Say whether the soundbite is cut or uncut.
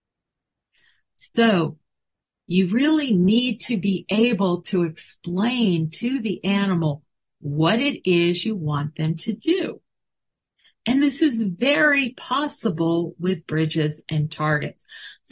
uncut